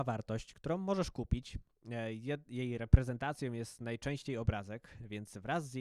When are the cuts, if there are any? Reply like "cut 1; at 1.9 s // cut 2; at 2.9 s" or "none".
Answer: none